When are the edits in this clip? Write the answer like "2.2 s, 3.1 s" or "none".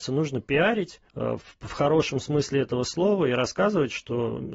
1.1 s